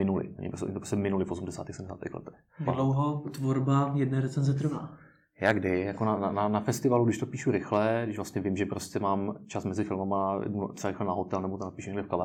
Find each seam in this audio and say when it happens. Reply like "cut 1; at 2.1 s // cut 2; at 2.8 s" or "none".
cut 1; at 2.7 s